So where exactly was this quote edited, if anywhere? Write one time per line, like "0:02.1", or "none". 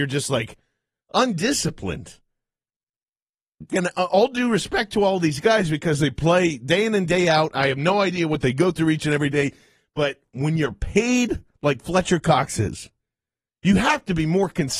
0:01.0
0:03.7